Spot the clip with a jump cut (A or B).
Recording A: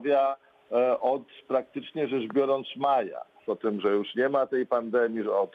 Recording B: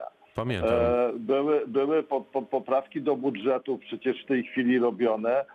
A